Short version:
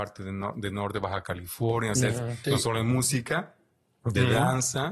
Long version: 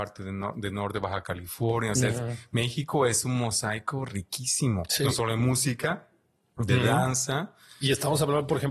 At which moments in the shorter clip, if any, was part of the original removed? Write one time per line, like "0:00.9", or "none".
0:02.4